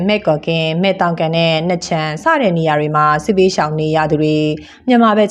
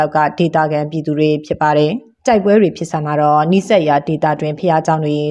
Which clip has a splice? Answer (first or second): second